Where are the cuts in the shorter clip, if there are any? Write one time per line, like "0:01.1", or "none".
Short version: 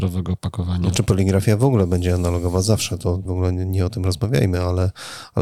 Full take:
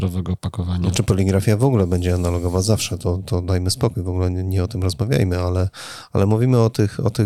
0:03.3